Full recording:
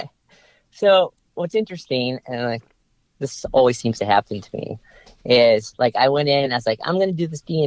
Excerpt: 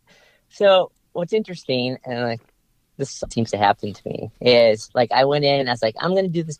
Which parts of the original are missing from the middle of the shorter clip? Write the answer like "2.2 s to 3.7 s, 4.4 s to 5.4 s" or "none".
3.5 s to 3.8 s, 4.8 s to 5.2 s